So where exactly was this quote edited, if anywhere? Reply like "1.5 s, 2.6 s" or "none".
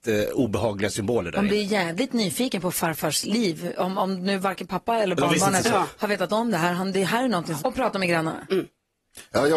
7.6 s